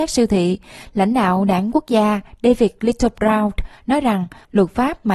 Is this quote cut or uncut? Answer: uncut